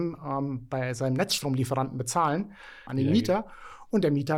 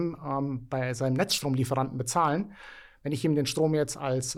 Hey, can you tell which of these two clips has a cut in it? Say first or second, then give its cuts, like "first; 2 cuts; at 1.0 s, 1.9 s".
first; 1 cut; at 2.9 s